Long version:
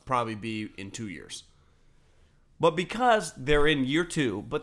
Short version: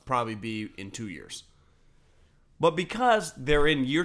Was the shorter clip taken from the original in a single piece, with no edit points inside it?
yes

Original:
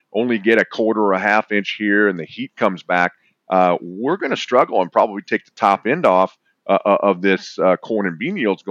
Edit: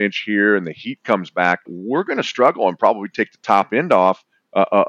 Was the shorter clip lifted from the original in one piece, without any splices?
no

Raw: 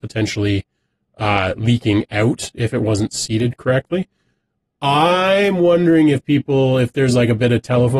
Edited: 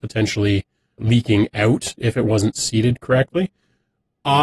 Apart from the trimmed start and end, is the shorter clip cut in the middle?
yes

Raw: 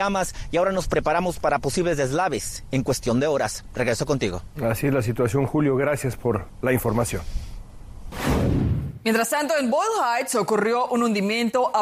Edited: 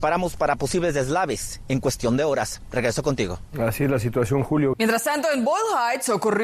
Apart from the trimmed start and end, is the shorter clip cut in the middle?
yes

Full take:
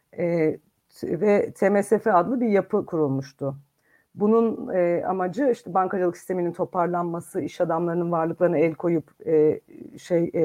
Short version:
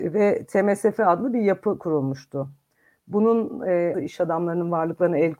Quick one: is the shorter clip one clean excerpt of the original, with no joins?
no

